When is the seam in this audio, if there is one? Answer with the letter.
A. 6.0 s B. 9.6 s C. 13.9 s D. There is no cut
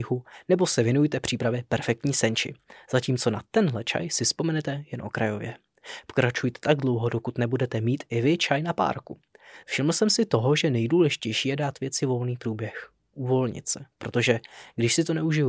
B